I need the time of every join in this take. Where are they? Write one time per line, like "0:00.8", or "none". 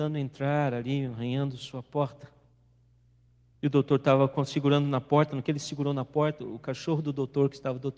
0:03.5